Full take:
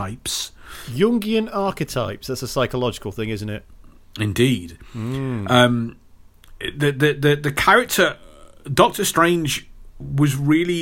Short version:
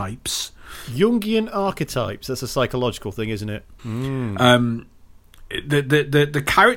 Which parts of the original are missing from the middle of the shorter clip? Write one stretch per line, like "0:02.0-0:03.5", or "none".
0:03.8-0:04.9